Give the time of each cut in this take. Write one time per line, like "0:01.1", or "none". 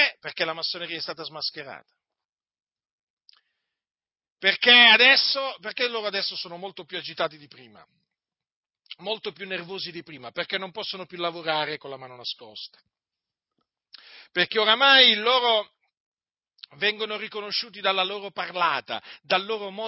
none